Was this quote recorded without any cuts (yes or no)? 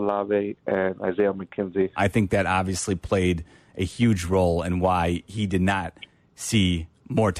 no